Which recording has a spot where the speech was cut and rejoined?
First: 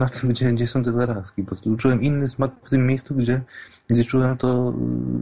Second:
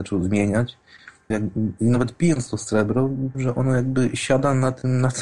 second; 2 cuts; at 1.3 s, 3.3 s

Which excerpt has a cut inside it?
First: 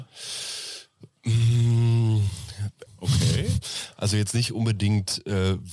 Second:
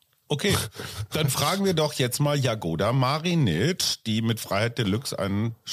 first; 1 cut; at 2.9 s

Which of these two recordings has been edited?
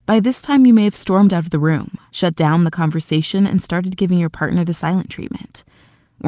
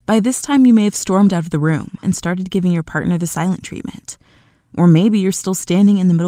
second; 1 cut; at 2.0 s

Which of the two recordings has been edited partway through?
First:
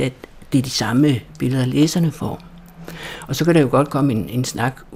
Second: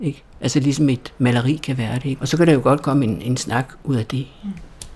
second; 1 cut; at 2.2 s

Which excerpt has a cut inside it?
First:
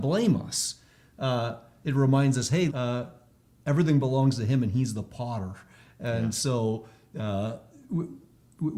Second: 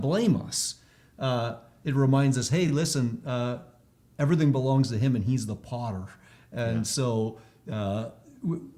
first; 1 cut; at 2.7 s

